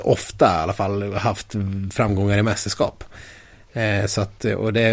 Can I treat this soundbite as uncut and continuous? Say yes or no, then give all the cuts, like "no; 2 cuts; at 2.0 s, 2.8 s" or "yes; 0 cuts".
yes; 0 cuts